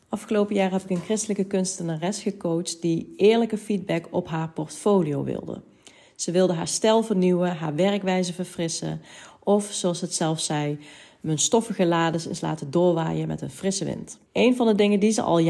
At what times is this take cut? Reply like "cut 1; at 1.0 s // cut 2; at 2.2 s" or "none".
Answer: cut 1; at 14.3 s